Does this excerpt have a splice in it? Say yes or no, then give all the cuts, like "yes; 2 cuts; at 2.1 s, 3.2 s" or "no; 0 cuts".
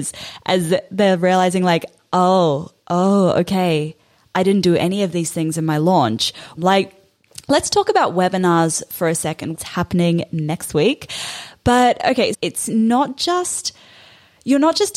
yes; 3 cuts; at 6.6 s, 9.5 s, 12.3 s